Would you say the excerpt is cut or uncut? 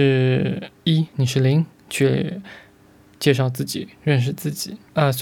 uncut